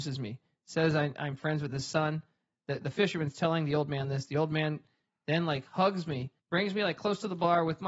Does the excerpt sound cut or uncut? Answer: cut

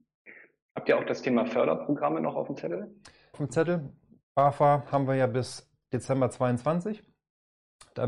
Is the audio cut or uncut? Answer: cut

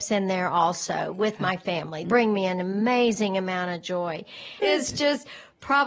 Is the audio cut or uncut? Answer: cut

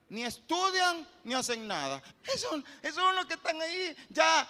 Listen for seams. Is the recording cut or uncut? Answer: cut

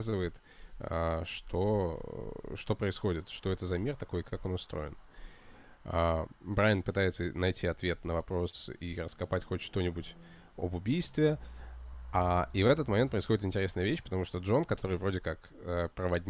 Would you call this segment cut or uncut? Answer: uncut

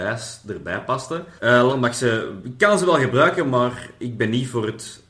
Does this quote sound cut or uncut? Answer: cut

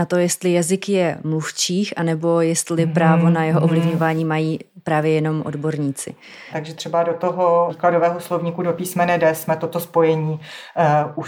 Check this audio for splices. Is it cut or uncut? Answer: cut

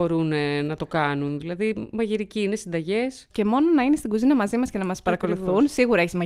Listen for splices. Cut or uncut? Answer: cut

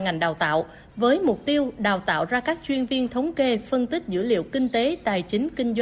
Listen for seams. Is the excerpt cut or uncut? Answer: cut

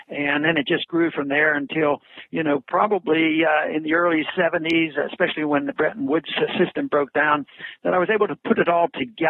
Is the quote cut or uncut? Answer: uncut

